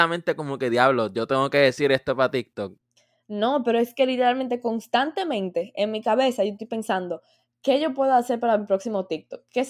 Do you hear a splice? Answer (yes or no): no